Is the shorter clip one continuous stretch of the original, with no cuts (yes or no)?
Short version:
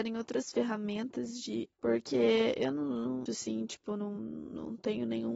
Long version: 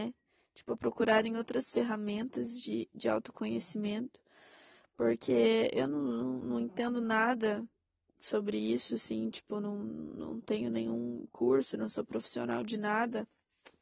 no